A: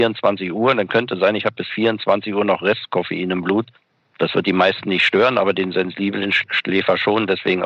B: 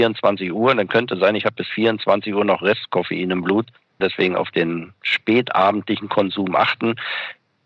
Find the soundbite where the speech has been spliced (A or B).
B